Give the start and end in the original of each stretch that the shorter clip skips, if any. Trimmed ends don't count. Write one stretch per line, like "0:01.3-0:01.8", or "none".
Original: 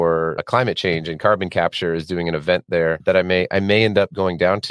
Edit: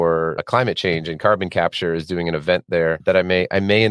none